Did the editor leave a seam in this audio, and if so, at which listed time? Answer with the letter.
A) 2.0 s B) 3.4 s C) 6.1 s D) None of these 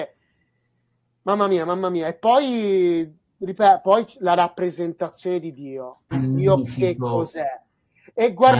C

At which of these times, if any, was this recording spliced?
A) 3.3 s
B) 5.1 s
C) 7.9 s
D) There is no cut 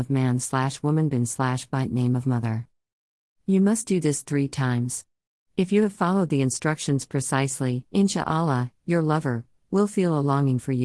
C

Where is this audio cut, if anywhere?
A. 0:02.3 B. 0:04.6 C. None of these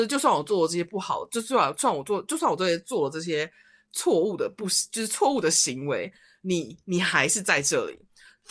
C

